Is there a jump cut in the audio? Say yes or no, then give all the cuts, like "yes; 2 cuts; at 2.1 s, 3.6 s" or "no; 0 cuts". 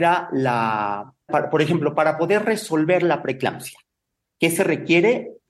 yes; 1 cut; at 1.3 s